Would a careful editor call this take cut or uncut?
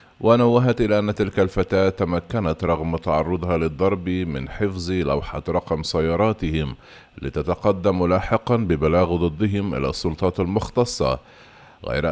uncut